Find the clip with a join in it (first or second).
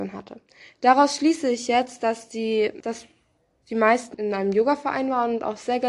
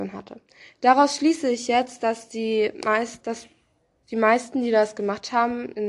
first